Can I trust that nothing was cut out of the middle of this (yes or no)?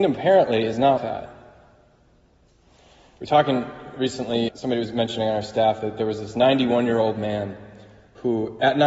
no